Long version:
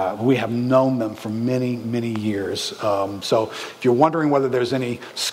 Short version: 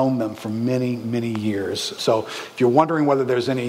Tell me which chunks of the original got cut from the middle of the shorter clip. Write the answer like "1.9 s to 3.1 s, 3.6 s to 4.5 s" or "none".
2.8 s to 3.2 s